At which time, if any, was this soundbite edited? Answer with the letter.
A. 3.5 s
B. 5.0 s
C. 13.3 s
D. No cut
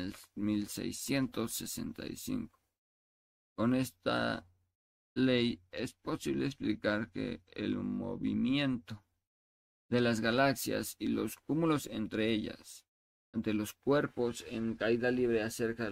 C